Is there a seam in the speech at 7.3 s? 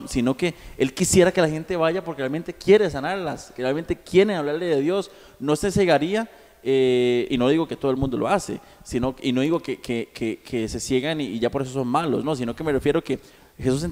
yes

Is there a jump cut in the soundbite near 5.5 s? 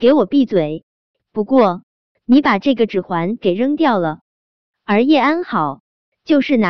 no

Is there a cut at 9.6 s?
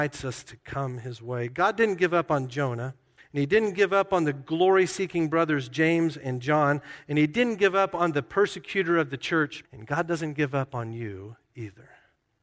yes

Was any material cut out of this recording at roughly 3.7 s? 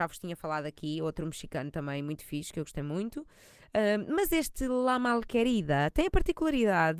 no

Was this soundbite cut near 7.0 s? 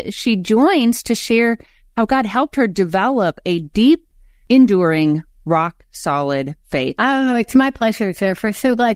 yes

